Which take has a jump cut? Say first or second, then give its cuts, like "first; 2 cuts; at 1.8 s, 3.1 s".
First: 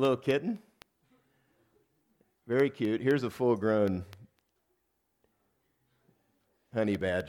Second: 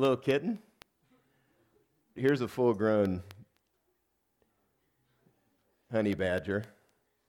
second; 1 cut; at 2.2 s